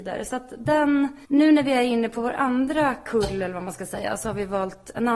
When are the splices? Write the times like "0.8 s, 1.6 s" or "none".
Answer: 1.2 s